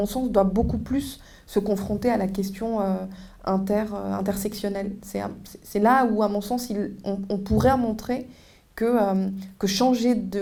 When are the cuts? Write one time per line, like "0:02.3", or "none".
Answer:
none